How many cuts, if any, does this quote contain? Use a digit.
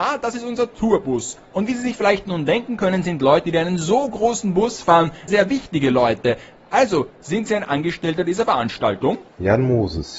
2